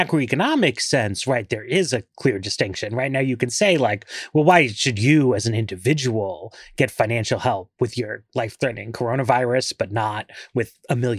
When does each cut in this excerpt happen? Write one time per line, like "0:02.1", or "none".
none